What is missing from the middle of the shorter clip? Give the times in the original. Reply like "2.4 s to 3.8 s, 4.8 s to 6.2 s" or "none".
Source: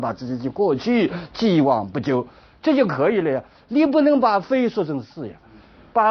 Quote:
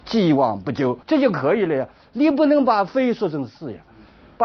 2.3 s to 2.6 s